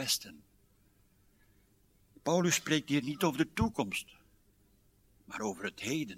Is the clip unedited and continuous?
yes; 0 cuts

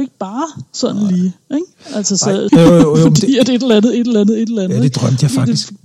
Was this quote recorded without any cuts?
no; 1 cut; at 2.5 s

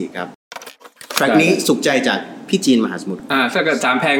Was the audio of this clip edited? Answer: no; 0 cuts

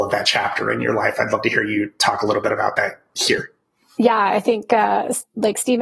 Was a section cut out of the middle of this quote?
no; 0 cuts

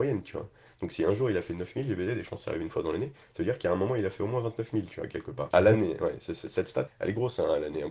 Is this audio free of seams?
no; 2 cuts; at 5.5 s, 6.9 s

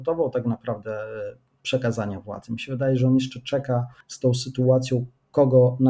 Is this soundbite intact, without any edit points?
yes; 0 cuts

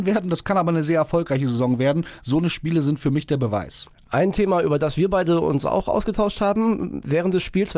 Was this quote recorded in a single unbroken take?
yes; 0 cuts

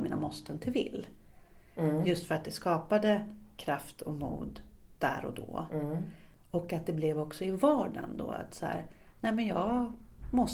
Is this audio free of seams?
yes; 0 cuts

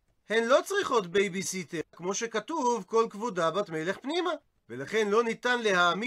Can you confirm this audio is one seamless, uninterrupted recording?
no; 1 cut; at 1.9 s

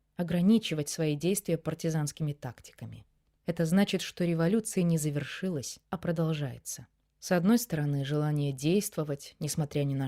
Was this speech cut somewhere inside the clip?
yes; 3 cuts; at 3.4 s, 5.8 s, 7.1 s

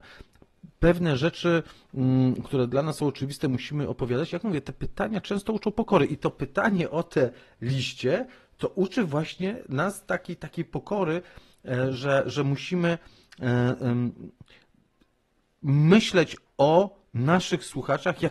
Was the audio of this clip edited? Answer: no; 0 cuts

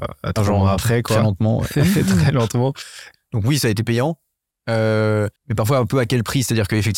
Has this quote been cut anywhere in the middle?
yes; 2 cuts; at 3.1 s, 5.4 s

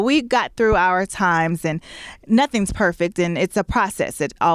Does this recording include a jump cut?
no; 0 cuts

